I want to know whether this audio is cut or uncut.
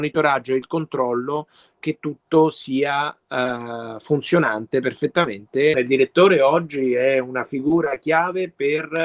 cut